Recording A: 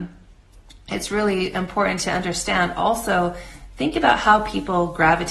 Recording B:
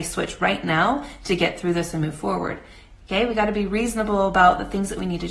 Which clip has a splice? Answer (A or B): B